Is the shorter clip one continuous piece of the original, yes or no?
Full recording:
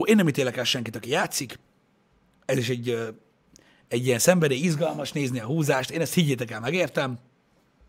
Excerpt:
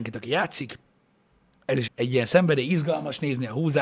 no